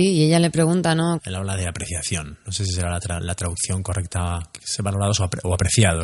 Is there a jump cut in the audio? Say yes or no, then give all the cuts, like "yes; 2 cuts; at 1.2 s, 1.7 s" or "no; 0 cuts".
yes; 1 cut; at 1.2 s